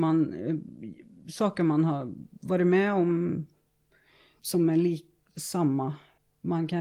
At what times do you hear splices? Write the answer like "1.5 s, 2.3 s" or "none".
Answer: 4.4 s